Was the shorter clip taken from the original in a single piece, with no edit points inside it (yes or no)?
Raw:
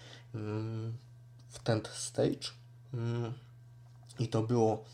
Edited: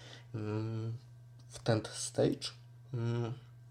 yes